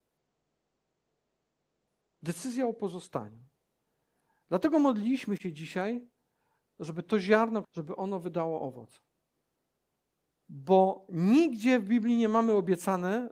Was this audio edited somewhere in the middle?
yes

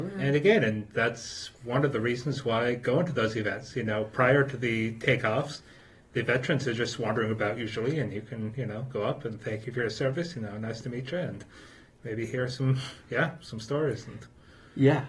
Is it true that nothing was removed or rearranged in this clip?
yes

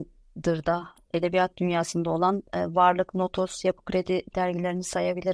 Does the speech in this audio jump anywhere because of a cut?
no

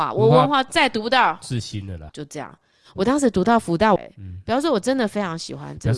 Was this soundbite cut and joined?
yes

